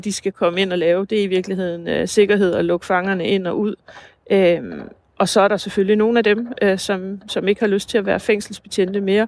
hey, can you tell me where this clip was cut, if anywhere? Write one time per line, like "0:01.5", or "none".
none